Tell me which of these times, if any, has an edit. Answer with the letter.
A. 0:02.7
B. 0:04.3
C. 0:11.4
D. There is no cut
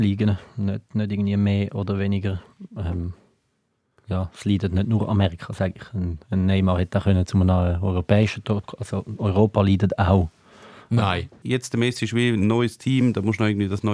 C